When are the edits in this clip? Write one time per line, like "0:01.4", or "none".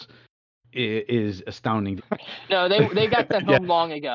0:02.0